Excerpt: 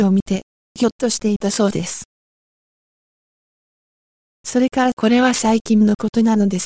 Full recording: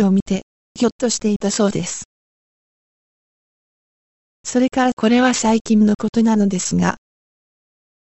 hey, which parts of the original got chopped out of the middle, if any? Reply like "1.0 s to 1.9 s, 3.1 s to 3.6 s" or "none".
none

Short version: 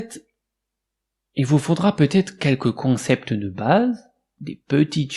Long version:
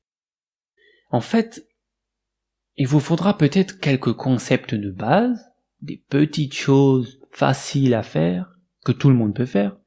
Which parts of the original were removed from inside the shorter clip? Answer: none

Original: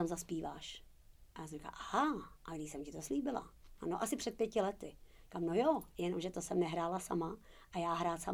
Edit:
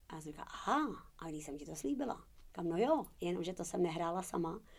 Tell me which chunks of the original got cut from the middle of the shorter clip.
3.8 s to 5.3 s

